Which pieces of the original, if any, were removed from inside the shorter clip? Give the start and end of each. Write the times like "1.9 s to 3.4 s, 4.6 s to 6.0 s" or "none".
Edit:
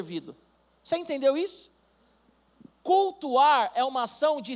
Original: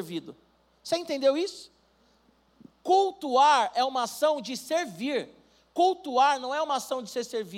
none